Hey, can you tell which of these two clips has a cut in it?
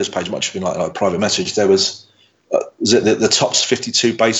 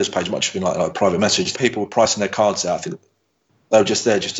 second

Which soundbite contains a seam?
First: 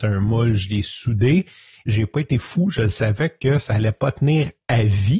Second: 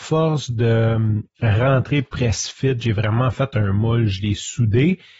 first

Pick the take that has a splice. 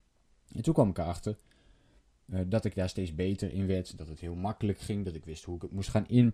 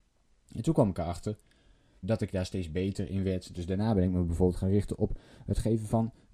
second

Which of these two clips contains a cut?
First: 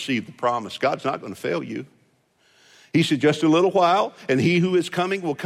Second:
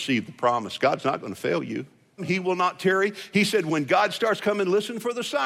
second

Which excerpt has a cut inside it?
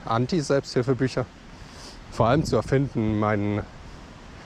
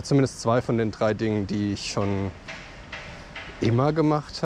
first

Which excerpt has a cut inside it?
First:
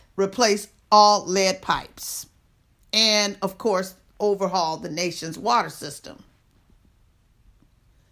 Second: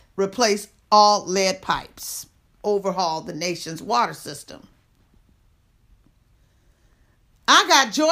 second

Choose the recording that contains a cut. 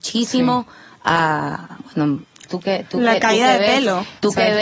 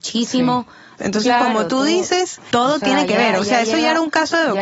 second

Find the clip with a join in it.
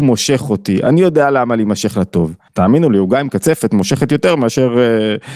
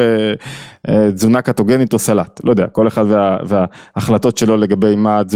first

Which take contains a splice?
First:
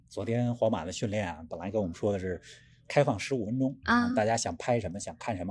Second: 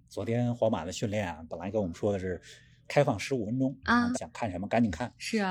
second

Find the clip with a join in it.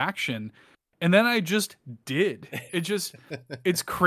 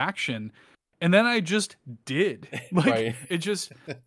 first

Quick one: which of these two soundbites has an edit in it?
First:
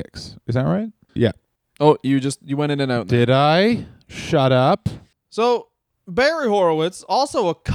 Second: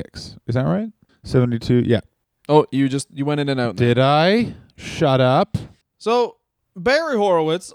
first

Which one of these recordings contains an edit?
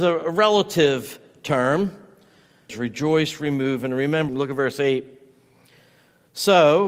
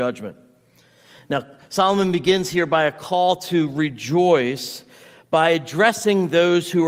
first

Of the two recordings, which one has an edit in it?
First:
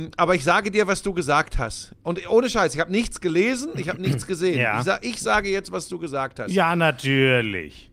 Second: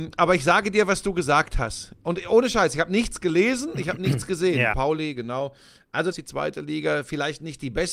second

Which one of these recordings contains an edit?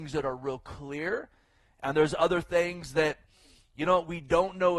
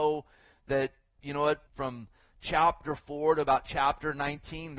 second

